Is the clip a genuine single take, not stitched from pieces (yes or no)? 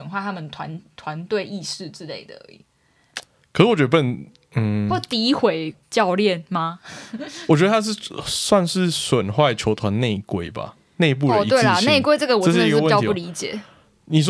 yes